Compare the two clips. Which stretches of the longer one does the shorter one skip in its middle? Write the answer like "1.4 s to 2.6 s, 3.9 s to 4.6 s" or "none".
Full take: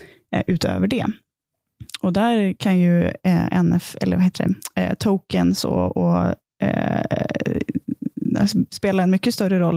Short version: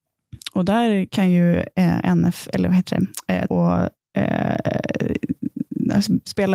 5.0 s to 5.9 s